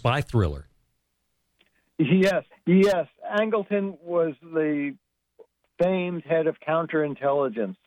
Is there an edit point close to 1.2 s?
no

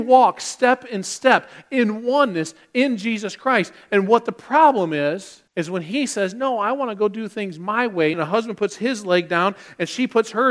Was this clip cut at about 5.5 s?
yes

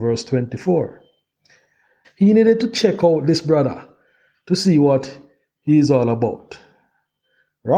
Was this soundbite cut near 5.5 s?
no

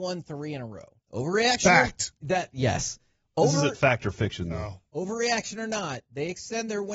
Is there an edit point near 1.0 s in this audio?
yes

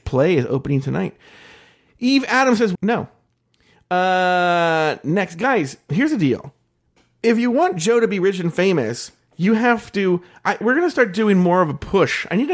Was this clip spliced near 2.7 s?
yes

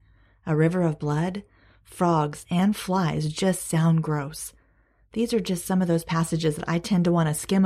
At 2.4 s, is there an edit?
yes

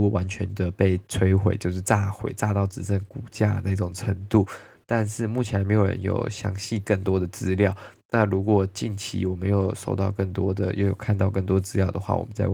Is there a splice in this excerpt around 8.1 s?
no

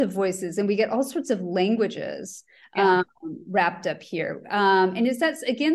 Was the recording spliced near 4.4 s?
no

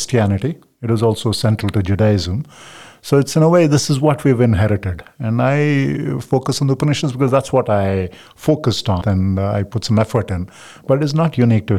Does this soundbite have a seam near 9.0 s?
yes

